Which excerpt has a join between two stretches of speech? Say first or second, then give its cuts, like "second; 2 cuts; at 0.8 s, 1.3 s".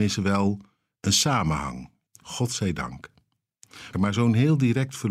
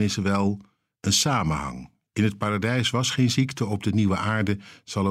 first; 2 cuts; at 2.1 s, 3.9 s